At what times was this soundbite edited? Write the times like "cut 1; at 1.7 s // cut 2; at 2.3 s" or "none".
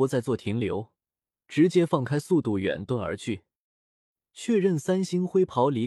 cut 1; at 1.3 s